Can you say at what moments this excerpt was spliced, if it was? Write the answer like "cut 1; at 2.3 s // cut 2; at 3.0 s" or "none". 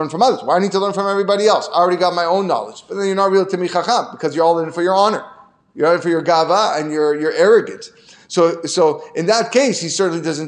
none

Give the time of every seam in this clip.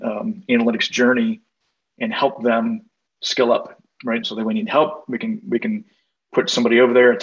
cut 1; at 4.2 s

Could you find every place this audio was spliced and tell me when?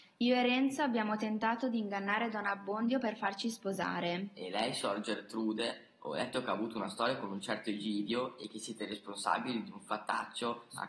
none

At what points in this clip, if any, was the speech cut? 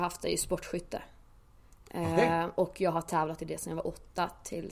none

